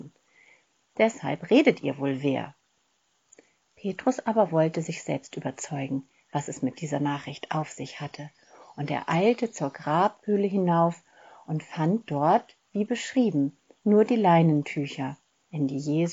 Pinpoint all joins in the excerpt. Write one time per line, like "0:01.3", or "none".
none